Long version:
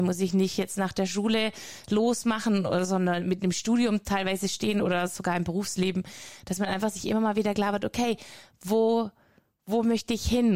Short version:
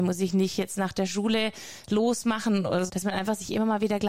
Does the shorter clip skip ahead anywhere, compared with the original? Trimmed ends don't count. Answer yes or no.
yes